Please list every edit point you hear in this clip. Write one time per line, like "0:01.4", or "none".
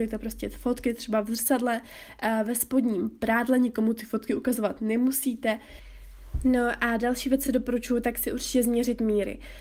none